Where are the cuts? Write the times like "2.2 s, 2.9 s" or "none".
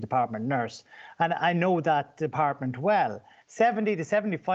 3.4 s